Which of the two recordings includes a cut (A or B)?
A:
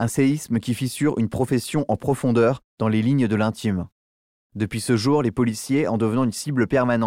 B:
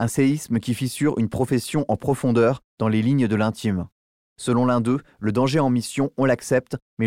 B